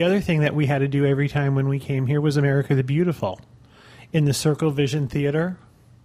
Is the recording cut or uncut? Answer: uncut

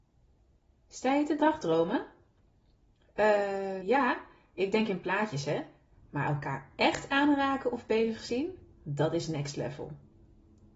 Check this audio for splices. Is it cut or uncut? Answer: cut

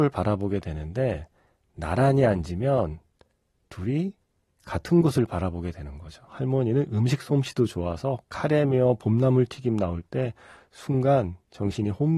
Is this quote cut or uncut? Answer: cut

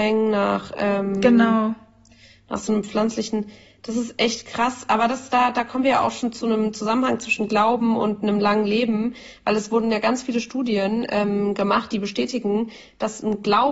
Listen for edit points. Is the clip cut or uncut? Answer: uncut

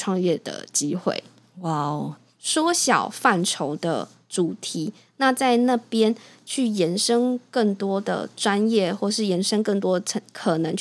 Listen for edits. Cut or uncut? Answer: cut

